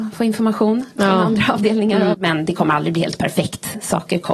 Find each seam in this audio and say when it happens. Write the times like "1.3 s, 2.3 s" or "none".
2.1 s